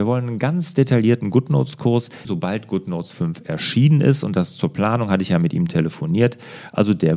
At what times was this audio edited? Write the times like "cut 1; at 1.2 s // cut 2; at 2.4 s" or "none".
cut 1; at 2.2 s